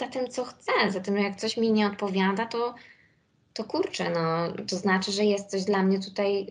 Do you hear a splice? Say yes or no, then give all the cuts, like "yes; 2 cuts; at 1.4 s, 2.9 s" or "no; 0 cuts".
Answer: no; 0 cuts